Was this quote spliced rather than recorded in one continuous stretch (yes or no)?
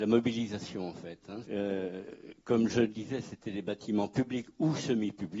yes